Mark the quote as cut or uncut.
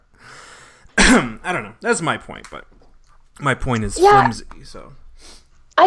uncut